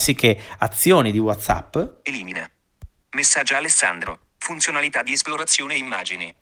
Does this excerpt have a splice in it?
no; 0 cuts

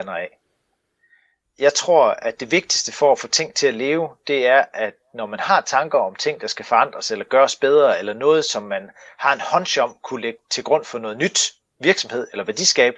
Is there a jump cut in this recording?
no; 0 cuts

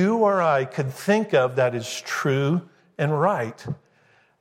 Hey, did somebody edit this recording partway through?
no; 0 cuts

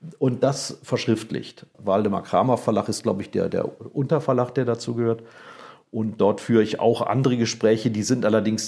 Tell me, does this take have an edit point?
yes; 1 cut; at 1.7 s

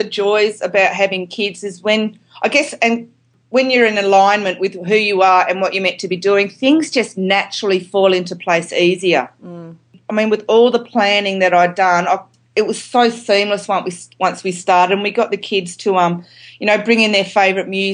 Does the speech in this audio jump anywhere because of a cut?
no; 0 cuts

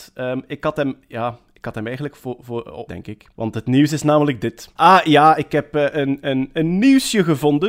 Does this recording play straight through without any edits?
no; 2 cuts; at 2.9 s, 4.8 s

